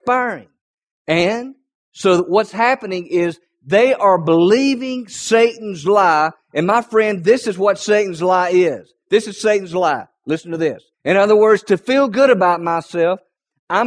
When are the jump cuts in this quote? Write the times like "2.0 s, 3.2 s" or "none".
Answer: 10.9 s

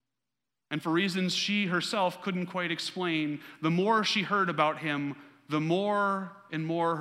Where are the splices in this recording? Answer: none

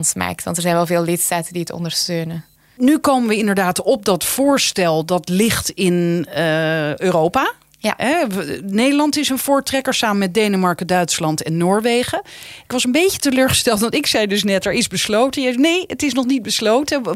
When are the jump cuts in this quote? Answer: none

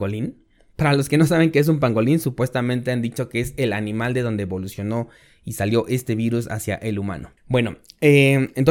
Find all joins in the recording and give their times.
7.4 s

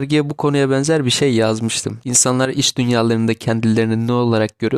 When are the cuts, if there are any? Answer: none

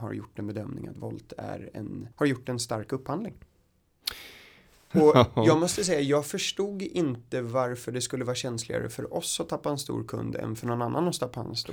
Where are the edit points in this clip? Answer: 2.1 s, 4.9 s

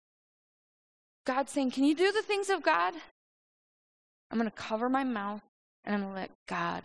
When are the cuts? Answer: 4.1 s

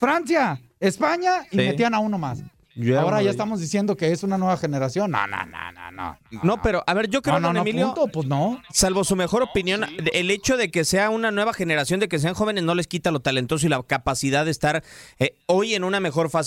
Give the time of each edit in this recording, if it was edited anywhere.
none

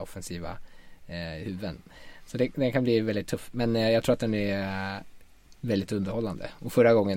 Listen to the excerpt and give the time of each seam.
none

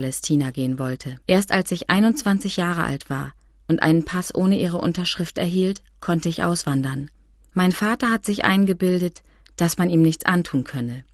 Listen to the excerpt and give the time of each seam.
1.2 s, 7.4 s

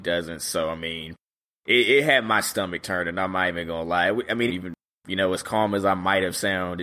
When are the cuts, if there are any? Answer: 4.5 s

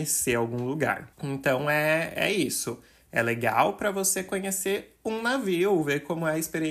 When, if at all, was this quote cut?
1.1 s

